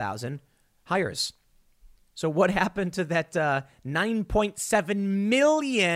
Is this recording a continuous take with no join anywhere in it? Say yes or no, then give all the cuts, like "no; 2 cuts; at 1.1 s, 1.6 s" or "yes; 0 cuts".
yes; 0 cuts